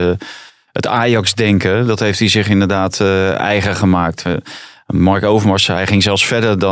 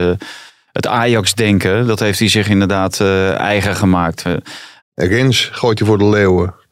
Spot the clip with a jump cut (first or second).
second